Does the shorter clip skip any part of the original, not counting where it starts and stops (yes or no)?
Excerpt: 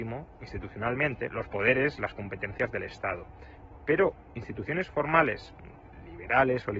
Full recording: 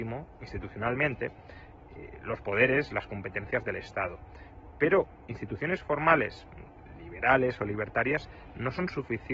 yes